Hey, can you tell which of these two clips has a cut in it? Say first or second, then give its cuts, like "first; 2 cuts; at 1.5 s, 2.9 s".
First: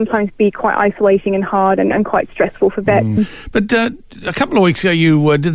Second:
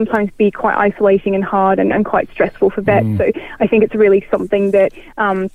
first; 1 cut; at 3.2 s